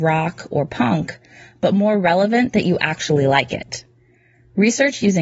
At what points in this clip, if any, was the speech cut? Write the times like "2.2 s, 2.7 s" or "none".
none